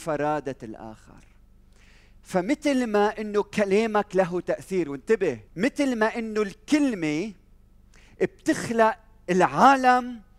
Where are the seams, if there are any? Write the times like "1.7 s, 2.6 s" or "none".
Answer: 5.5 s